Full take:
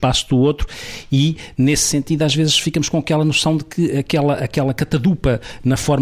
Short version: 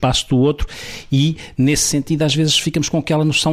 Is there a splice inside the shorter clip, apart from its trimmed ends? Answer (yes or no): no